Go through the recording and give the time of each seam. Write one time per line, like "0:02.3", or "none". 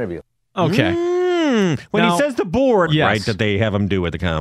0:02.9